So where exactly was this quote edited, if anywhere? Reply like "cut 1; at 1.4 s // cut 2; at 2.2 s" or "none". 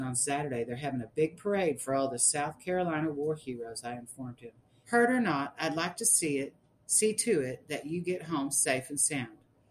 cut 1; at 4.8 s